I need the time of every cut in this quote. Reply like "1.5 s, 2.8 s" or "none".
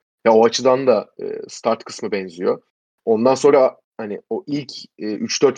none